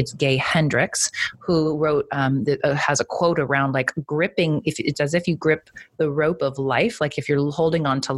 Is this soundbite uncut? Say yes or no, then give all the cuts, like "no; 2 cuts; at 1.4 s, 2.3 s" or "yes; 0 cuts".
yes; 0 cuts